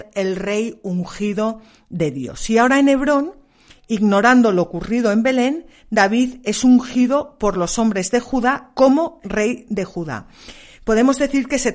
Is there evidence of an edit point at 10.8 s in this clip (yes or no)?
no